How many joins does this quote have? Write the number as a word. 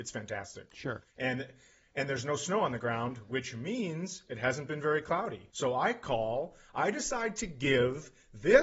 two